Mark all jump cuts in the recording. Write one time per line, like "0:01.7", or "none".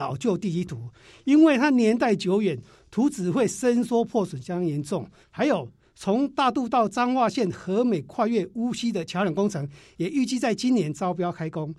0:05.2